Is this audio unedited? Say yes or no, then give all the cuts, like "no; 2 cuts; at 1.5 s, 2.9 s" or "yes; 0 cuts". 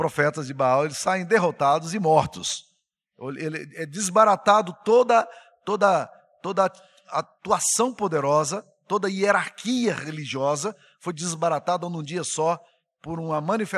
yes; 0 cuts